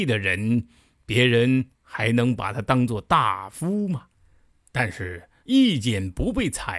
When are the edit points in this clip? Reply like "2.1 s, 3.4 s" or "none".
5.4 s